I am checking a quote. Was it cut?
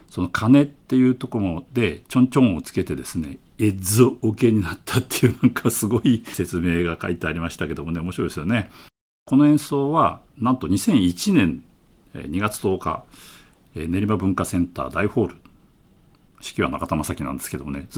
no; 0 cuts

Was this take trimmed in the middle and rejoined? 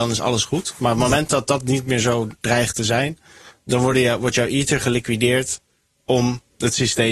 no; 0 cuts

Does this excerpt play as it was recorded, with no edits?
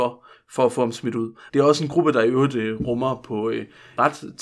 no; 1 cut; at 1.5 s

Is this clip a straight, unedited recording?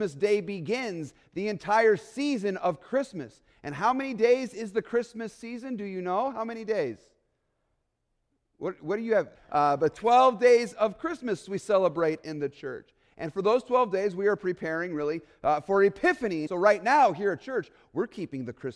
no; 2 cuts; at 9.3 s, 16.5 s

